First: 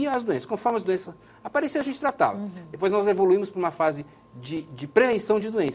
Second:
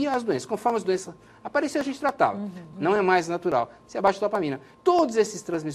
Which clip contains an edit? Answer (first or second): second